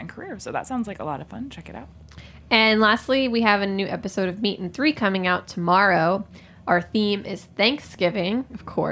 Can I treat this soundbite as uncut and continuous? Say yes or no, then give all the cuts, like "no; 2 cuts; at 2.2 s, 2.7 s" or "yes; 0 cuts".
yes; 0 cuts